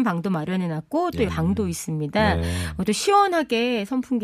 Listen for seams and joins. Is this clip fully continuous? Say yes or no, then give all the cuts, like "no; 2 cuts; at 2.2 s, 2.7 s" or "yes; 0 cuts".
no; 1 cut; at 1.3 s